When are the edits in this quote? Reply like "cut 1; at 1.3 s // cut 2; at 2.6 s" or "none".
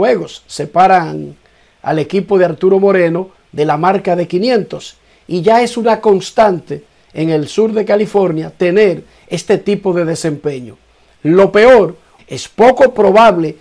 cut 1; at 12.2 s

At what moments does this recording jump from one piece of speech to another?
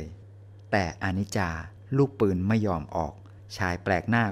none

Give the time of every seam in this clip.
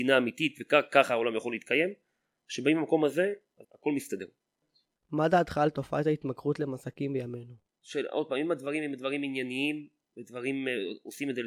cut 1; at 3.6 s

